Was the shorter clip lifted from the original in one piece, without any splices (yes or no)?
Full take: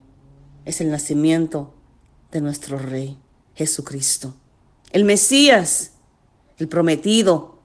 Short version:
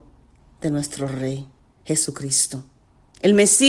yes